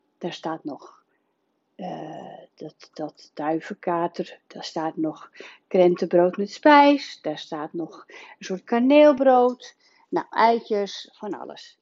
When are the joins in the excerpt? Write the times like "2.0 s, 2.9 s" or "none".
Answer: none